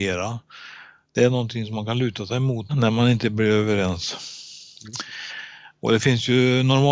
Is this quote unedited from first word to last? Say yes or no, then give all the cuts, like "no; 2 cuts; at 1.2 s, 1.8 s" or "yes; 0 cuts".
no; 1 cut; at 2.7 s